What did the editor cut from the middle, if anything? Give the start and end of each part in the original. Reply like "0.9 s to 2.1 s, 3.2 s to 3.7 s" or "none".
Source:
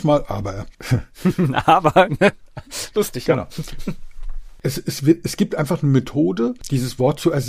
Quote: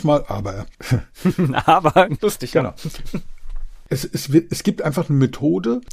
2.2 s to 2.9 s